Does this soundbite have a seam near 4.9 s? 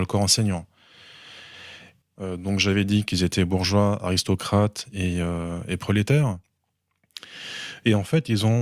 no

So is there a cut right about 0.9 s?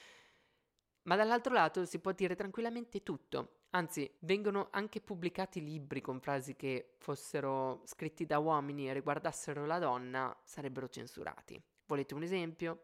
no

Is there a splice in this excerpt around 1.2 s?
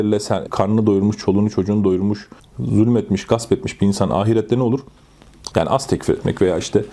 no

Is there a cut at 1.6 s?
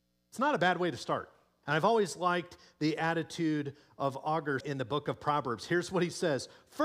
yes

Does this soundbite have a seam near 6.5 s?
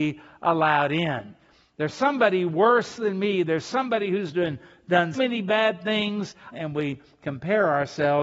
yes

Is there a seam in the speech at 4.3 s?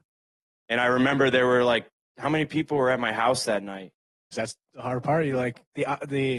yes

